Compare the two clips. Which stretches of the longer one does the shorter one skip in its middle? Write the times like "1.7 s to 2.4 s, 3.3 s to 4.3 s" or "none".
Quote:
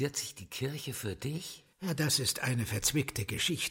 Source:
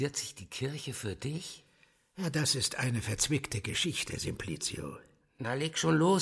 1.7 s to 2.1 s